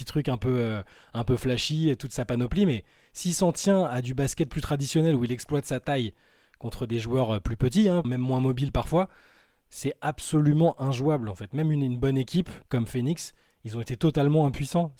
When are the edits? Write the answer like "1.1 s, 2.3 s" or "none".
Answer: 8.0 s, 12.7 s